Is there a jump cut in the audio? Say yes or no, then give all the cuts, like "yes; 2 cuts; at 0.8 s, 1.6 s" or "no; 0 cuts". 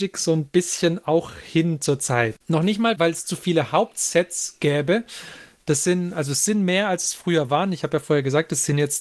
yes; 1 cut; at 2.4 s